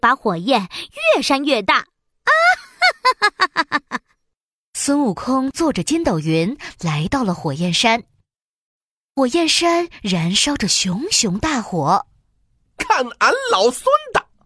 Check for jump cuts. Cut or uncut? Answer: cut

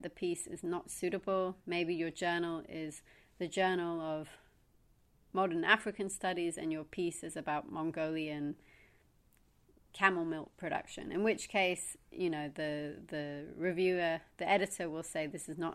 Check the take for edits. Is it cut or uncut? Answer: uncut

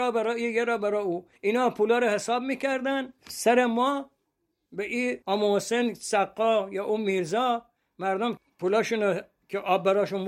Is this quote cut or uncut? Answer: cut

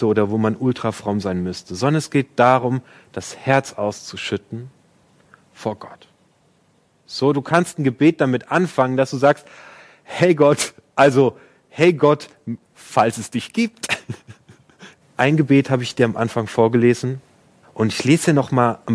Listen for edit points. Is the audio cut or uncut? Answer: cut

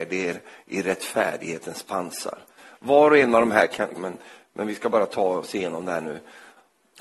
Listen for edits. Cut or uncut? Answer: cut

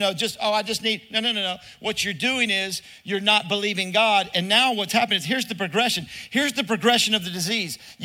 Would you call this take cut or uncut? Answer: uncut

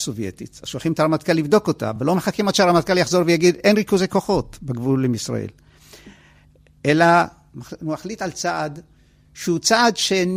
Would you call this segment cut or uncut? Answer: uncut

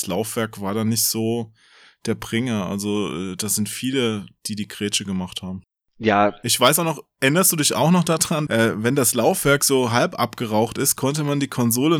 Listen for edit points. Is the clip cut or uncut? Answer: cut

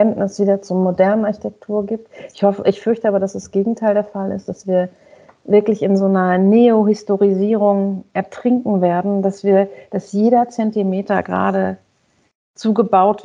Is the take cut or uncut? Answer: uncut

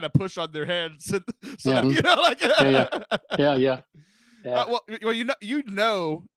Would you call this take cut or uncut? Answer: cut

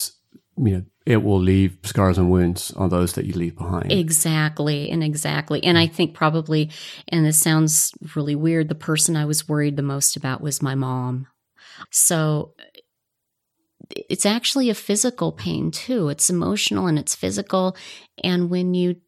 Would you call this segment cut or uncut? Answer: cut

